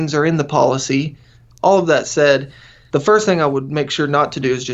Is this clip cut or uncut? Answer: cut